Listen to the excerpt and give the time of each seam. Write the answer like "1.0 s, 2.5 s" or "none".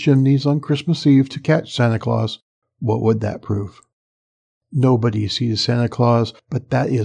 2.6 s